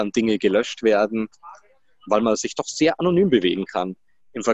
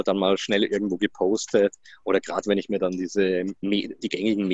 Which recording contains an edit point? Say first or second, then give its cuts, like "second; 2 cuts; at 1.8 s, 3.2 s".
second; 1 cut; at 3.6 s